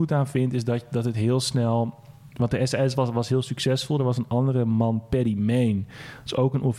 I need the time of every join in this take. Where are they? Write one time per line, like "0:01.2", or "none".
none